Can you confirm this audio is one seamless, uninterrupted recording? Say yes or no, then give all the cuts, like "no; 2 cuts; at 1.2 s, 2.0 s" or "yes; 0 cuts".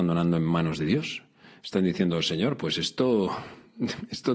yes; 0 cuts